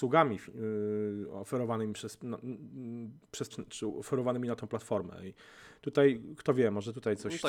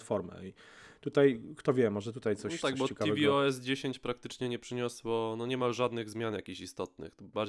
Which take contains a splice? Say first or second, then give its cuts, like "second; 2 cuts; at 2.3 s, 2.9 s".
first; 1 cut; at 3.5 s